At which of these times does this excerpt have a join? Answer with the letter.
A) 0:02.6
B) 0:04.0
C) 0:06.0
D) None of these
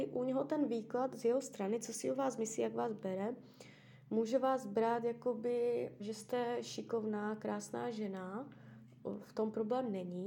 C